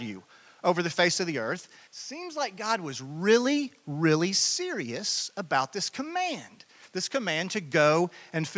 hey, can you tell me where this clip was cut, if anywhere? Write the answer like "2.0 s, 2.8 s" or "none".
1.9 s

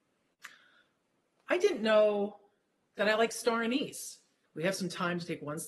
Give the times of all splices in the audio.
1.4 s, 4.4 s

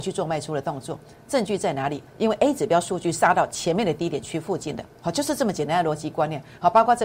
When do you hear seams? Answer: 2.1 s, 4.9 s

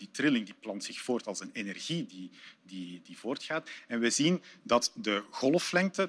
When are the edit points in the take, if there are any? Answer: none

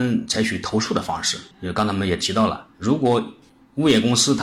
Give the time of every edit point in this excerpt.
1.5 s

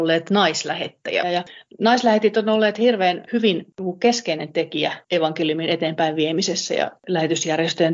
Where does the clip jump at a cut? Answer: 1.2 s, 3.3 s

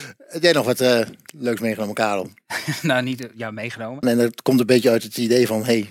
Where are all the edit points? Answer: 4.0 s

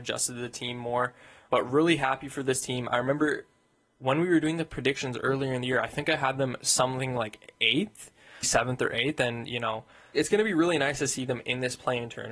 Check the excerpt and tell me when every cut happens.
8.4 s

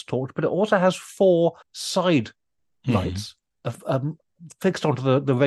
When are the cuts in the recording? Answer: 1.6 s

